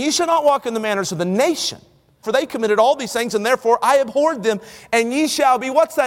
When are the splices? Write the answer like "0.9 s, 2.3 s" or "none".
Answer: 2.2 s